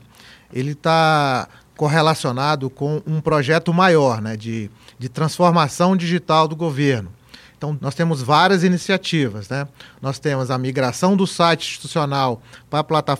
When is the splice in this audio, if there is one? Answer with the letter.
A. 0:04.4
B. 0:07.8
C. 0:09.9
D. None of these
B